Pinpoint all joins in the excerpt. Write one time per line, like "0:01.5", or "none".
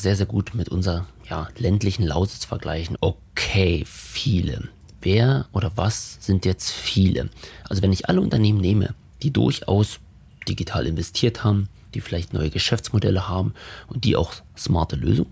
0:03.0